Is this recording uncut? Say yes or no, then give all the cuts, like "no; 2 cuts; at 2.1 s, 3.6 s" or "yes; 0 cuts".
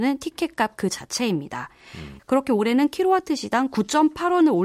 no; 1 cut; at 2.2 s